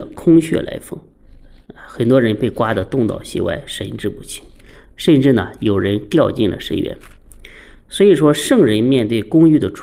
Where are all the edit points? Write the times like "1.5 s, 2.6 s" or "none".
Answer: none